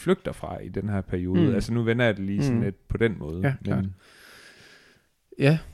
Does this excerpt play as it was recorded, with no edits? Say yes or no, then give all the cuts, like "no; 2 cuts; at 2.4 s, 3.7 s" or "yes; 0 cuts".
yes; 0 cuts